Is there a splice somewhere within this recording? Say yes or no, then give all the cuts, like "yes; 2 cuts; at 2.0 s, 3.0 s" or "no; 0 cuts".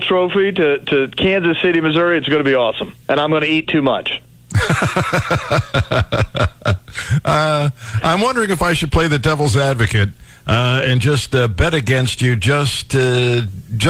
yes; 1 cut; at 3.0 s